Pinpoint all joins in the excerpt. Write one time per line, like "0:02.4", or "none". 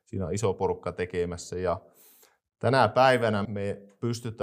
0:03.5